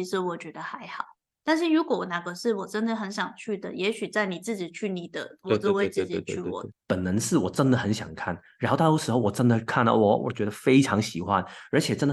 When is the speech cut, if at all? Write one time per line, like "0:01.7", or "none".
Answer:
0:06.7